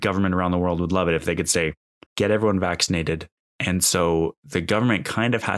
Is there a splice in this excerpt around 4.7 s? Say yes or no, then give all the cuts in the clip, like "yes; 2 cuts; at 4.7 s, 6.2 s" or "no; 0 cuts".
no; 2 cuts; at 2.1 s, 3.4 s